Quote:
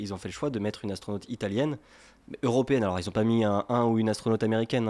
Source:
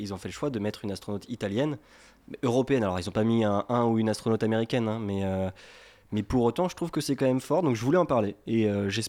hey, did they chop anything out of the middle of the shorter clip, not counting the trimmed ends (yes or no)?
no